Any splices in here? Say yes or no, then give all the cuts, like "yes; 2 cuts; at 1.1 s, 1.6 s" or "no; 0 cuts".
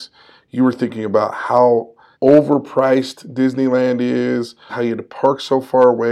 yes; 2 cuts; at 2.1 s, 4.7 s